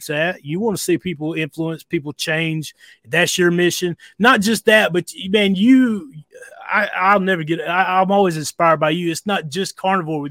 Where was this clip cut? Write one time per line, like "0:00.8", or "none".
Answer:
none